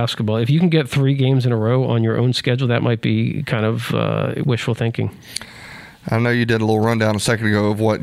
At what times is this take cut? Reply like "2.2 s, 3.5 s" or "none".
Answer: none